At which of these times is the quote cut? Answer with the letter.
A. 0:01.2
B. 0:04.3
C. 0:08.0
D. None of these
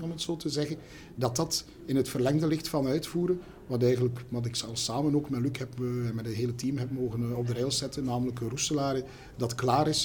D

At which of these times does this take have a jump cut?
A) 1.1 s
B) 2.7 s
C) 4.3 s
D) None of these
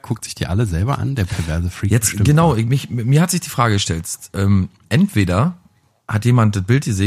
B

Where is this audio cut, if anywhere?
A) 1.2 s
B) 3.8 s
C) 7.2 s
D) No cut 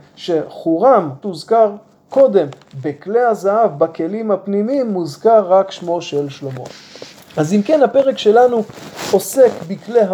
A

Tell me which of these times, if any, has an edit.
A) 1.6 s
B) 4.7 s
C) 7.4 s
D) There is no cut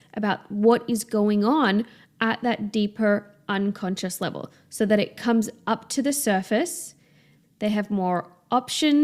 C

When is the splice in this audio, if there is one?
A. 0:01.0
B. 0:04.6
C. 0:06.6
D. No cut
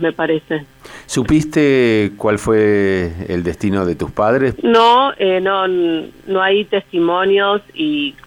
B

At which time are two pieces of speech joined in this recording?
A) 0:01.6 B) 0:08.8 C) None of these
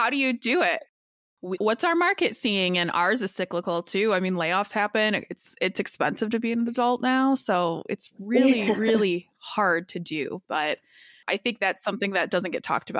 A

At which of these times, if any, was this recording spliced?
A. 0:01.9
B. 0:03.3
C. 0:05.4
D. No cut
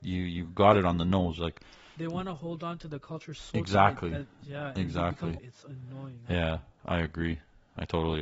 C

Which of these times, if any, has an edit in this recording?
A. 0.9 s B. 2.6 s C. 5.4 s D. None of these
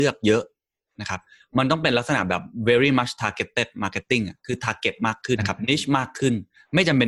C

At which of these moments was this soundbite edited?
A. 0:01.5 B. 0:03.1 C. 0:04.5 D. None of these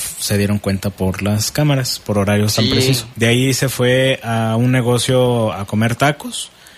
B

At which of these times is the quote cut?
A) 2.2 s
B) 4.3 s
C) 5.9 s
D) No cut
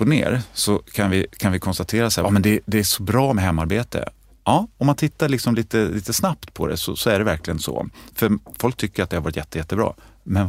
A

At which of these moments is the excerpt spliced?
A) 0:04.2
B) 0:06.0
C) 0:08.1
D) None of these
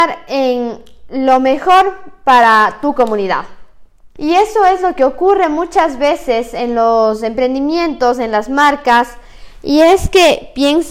A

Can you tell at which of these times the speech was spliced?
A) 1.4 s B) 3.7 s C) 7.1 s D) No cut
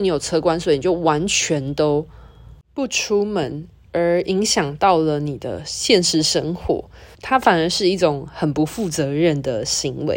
C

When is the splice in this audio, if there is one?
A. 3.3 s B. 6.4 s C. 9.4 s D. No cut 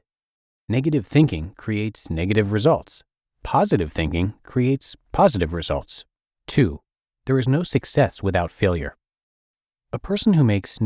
B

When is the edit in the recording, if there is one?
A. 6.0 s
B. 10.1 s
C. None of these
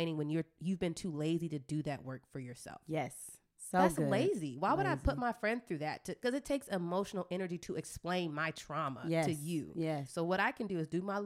B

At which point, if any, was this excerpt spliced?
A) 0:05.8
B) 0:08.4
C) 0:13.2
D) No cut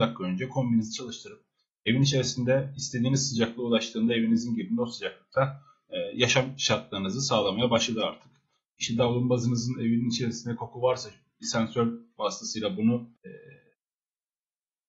C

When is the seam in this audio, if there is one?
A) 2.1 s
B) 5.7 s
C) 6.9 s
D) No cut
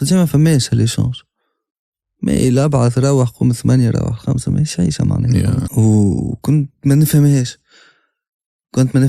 B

